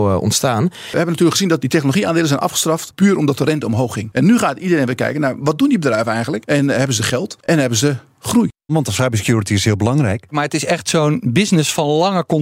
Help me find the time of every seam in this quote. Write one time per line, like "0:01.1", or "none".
0:01.6
0:08.7
0:10.3